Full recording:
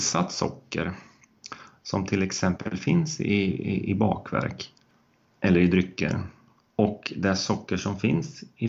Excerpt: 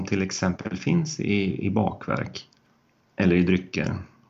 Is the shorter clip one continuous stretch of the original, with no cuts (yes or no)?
no